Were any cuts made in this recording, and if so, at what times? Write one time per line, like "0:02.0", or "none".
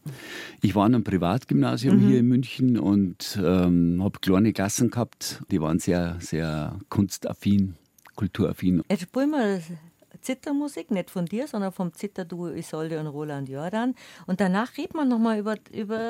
0:05.5
0:08.8